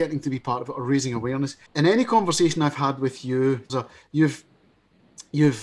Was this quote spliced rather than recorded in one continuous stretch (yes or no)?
yes